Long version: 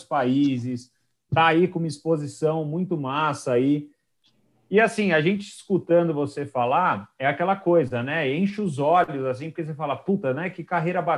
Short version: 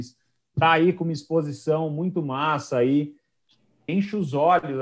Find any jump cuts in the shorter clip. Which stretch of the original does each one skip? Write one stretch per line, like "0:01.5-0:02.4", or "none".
0:04.6-0:08.3